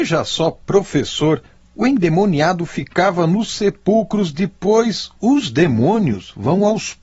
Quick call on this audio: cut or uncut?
uncut